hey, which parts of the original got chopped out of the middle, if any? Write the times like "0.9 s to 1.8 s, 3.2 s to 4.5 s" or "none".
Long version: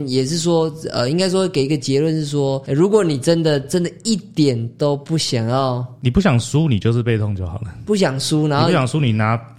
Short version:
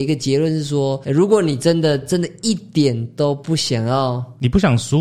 none